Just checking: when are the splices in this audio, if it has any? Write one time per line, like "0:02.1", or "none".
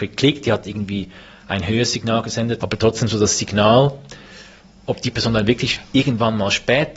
0:02.6